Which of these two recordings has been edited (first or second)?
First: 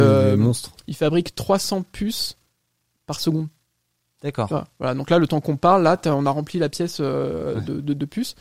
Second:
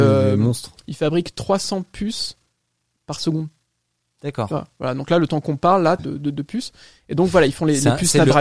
second